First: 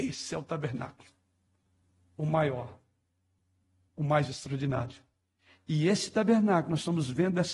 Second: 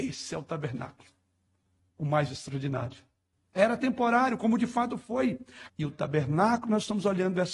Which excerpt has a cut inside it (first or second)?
second